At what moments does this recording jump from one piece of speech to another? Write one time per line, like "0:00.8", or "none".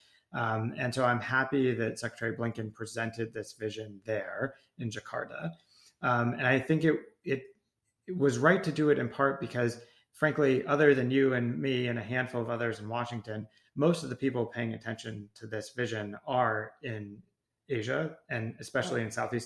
none